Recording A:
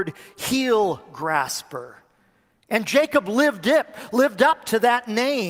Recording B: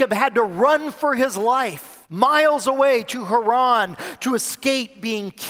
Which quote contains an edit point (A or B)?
B